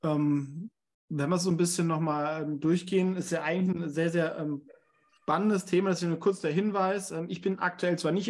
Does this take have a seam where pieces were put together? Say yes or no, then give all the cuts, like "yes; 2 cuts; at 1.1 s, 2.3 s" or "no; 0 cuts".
no; 0 cuts